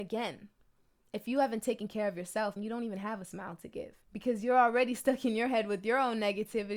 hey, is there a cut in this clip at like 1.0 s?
no; 2 cuts; at 2.6 s, 4.0 s

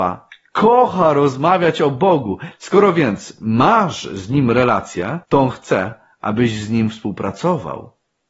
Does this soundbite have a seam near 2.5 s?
yes; 2 cuts; at 2.5 s, 5.2 s

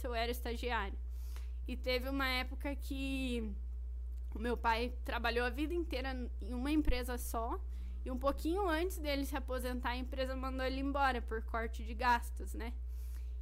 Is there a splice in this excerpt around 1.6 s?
yes; 1 cut; at 1.6 s

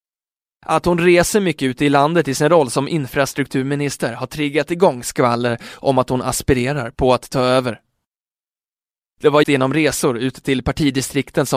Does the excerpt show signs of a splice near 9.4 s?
yes; 1 cut; at 9.4 s

